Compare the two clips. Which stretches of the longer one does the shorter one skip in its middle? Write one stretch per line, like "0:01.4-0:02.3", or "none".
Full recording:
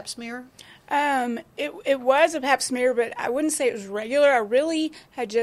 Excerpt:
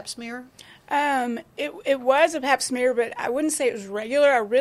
none